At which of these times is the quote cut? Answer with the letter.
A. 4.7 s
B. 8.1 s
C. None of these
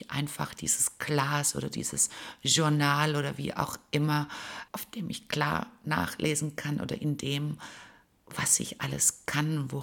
A